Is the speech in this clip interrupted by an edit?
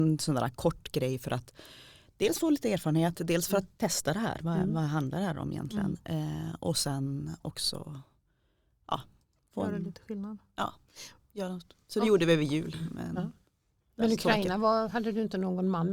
no; 0 cuts

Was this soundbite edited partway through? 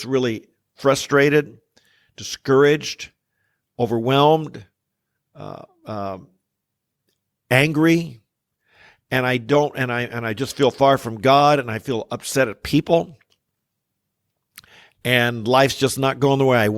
no; 0 cuts

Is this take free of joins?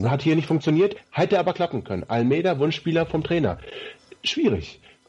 no; 1 cut; at 1.0 s

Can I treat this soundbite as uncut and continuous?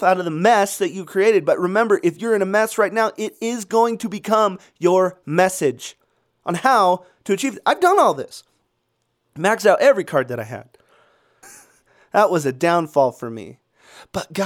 no; 1 cut; at 11.4 s

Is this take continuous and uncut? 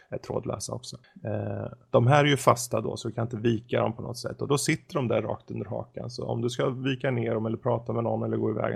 yes; 0 cuts

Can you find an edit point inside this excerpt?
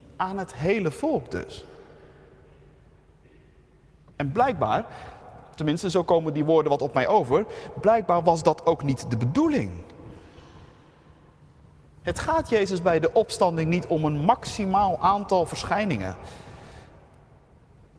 no; 0 cuts

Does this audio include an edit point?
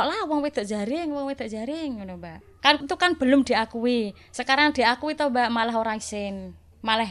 yes; 1 cut; at 2.8 s

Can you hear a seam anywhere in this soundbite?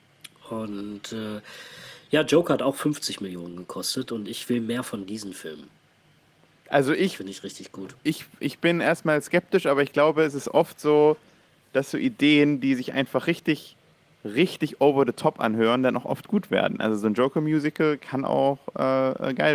no; 0 cuts

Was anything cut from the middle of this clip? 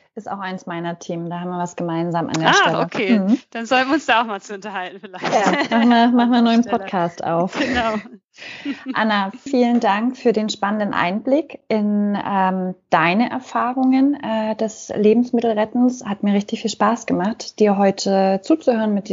yes; 1 cut; at 9.5 s

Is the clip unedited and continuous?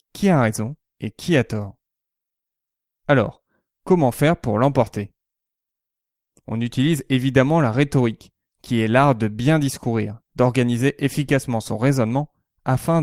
yes; 0 cuts

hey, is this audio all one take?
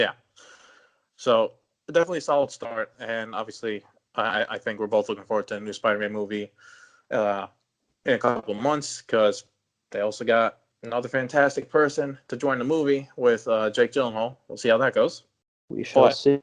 yes; 0 cuts

